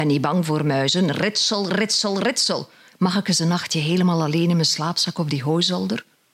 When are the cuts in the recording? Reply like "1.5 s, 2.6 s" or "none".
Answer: 2.9 s